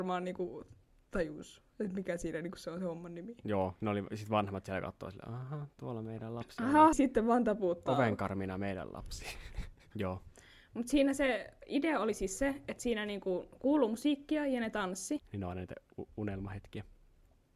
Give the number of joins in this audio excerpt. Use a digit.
3